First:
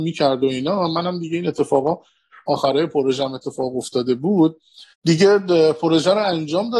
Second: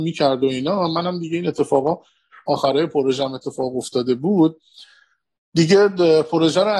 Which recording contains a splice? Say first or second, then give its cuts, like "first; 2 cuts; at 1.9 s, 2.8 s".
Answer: first; 1 cut; at 4.9 s